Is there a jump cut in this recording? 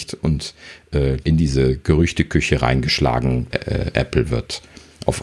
yes; 2 cuts; at 1.2 s, 3.5 s

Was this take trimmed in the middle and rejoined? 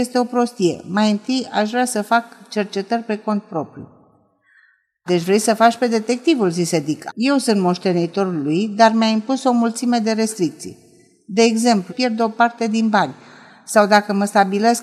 yes; 3 cuts; at 5.1 s, 7.1 s, 11.9 s

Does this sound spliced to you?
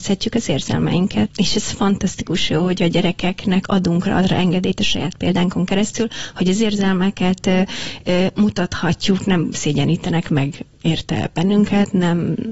yes; 1 cut; at 1.3 s

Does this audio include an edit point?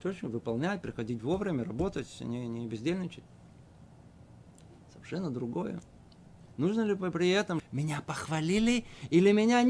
yes; 2 cuts; at 6.5 s, 7.6 s

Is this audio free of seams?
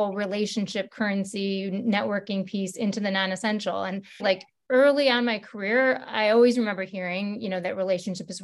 no; 1 cut; at 4.2 s

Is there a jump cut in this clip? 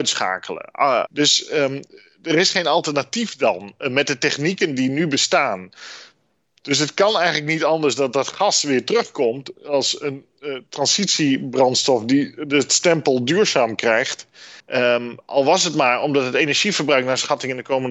yes; 2 cuts; at 1.1 s, 14.6 s

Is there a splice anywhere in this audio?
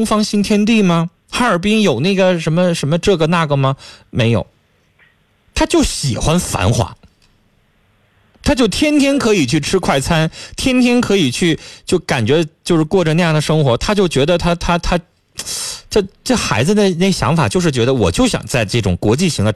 no; 0 cuts

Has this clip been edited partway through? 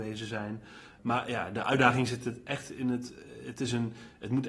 no; 0 cuts

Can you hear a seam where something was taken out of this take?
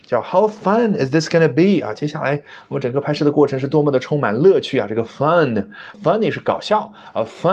yes; 1 cut; at 5.9 s

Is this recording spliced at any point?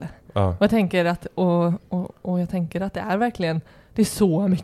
no; 0 cuts

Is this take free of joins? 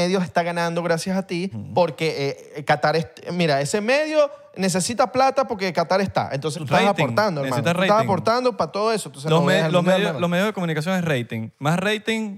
no; 2 cuts; at 1.5 s, 6.5 s

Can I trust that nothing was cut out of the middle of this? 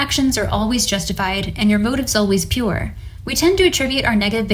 no; 1 cut; at 3.2 s

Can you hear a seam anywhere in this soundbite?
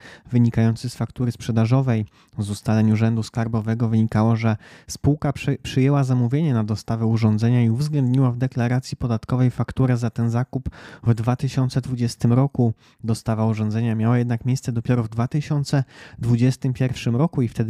no; 0 cuts

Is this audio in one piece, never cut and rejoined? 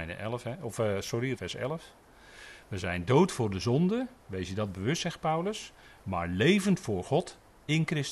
no; 1 cut; at 1.3 s

